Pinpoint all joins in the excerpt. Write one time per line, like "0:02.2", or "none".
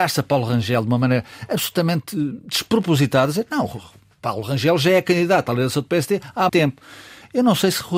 0:06.5